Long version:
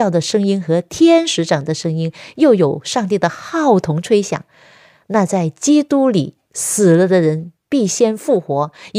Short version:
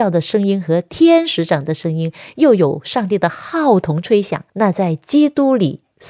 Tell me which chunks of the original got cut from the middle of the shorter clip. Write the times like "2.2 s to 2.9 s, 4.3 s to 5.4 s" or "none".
4.5 s to 5.0 s